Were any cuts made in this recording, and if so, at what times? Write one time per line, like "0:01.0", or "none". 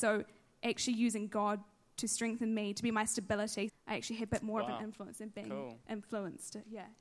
0:03.7